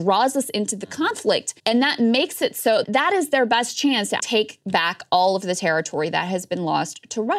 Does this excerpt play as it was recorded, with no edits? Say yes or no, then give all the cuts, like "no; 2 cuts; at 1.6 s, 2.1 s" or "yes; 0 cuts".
no; 3 cuts; at 1.6 s, 2.8 s, 4.2 s